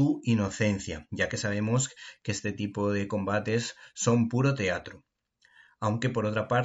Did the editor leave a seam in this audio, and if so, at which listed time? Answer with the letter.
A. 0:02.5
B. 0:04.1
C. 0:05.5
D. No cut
D